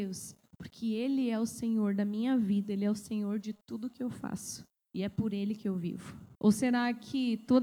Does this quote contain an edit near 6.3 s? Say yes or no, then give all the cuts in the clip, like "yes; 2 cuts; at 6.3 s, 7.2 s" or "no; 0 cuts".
yes; 1 cut; at 6.3 s